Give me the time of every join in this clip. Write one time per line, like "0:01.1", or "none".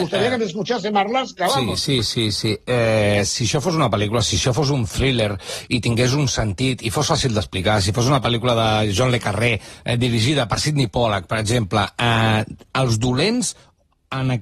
0:02.0

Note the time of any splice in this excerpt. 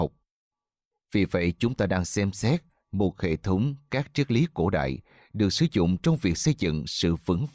0:00.9

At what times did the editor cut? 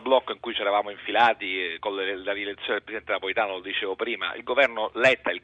none

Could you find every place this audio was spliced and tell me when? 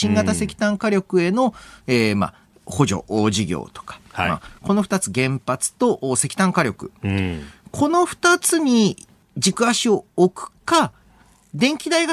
none

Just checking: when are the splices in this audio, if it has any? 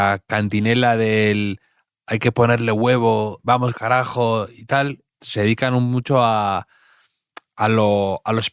0:03.4
0:05.1

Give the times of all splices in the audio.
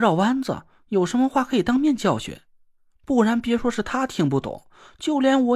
none

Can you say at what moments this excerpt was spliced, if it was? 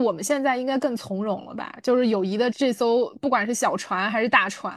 0:02.5

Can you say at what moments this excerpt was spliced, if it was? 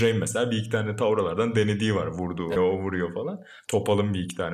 0:02.6

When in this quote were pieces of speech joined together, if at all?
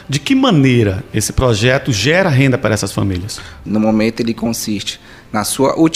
0:03.7

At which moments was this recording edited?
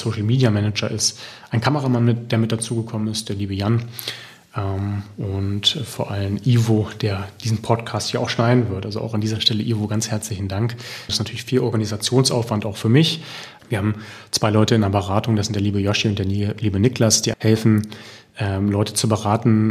0:11.1
0:13.6
0:17.3

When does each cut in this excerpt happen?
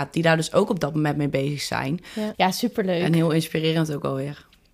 0:02.3

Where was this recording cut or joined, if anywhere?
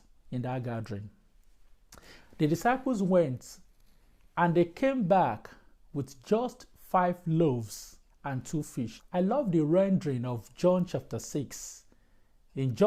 0:09.0

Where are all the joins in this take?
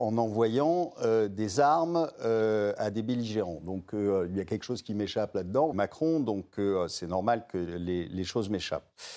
0:05.7

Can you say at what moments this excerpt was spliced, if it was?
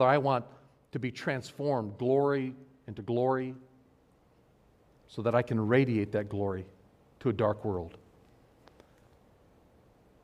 none

